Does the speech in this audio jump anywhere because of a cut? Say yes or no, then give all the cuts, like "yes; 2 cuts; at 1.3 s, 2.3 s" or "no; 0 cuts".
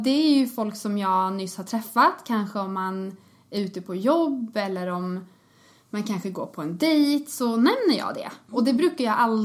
yes; 1 cut; at 8.5 s